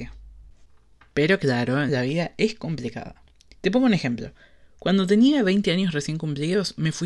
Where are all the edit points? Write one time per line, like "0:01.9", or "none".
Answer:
0:01.9